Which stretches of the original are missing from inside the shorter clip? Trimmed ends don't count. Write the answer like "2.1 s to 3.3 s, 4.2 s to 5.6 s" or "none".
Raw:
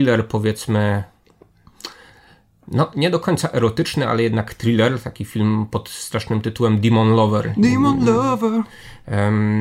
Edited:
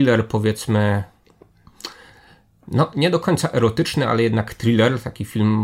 none